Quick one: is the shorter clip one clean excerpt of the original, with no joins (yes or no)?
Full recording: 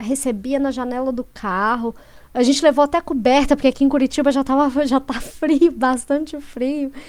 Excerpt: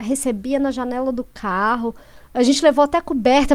yes